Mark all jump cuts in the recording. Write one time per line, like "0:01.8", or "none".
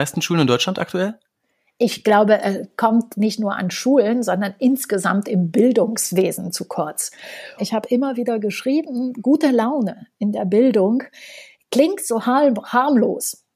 0:07.6